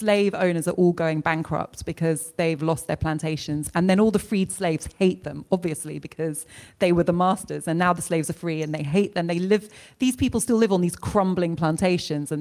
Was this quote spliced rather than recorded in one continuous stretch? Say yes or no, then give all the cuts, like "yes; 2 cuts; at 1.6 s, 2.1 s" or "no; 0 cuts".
no; 0 cuts